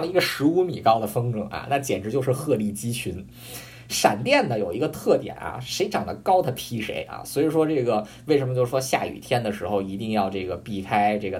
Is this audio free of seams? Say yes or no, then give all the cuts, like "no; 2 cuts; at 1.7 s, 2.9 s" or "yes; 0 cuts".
yes; 0 cuts